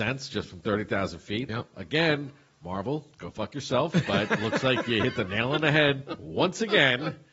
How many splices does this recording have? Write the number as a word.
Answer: one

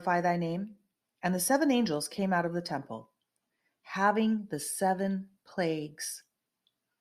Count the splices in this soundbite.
one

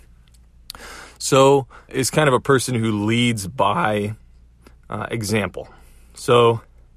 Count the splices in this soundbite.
one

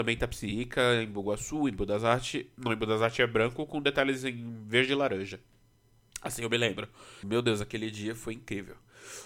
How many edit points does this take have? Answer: one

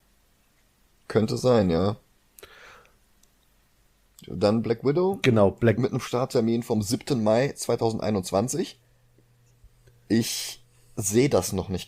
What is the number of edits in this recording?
zero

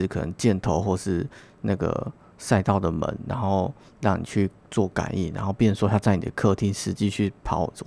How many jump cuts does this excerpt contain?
zero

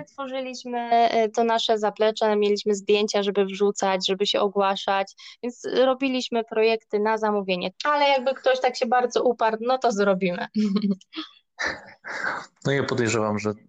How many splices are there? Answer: one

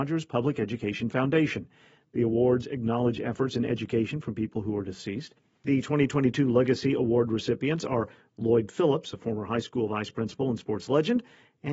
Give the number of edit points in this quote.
zero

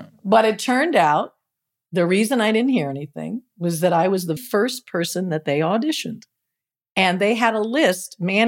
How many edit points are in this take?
one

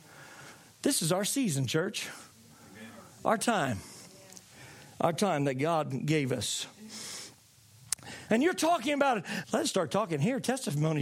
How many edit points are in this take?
two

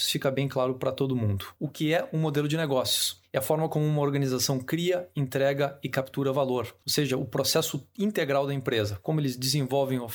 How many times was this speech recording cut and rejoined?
one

